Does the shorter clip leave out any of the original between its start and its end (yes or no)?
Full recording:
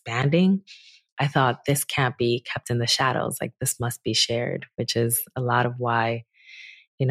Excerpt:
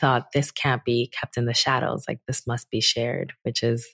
no